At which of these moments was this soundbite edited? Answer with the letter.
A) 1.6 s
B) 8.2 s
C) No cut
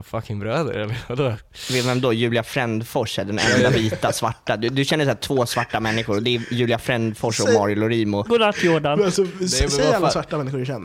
B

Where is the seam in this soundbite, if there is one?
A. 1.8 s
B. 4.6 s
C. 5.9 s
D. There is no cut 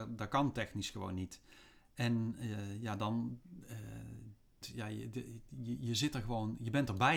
B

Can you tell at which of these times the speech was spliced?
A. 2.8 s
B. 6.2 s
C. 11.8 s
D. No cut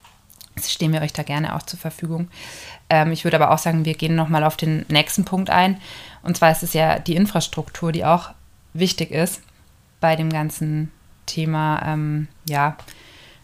D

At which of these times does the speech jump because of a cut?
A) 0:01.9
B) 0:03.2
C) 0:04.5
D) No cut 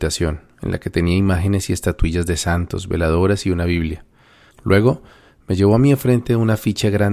C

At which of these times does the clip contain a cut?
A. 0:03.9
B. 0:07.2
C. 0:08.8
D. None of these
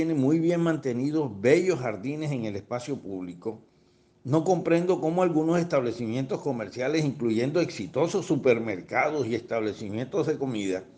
D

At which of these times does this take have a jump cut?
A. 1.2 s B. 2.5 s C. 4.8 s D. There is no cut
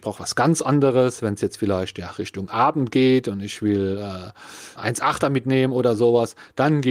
C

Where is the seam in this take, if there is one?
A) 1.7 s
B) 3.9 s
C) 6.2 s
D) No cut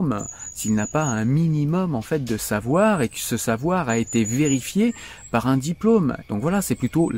C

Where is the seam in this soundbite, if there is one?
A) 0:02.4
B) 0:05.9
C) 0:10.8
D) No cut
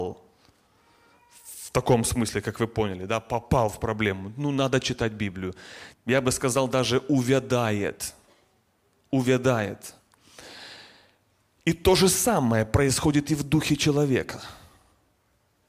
B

